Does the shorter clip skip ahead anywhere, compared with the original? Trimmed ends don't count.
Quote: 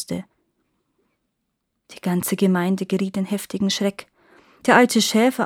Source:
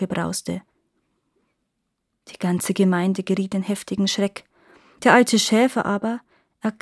no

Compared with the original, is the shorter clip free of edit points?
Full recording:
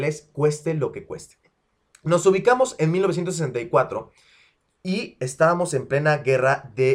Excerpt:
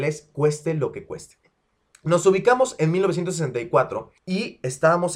no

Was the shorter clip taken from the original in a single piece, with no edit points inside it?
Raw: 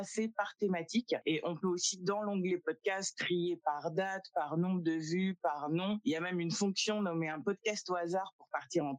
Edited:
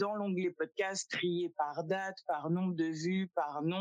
yes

